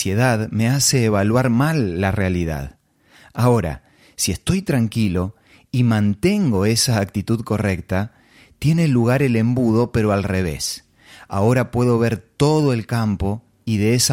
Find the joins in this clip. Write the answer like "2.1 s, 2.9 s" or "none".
none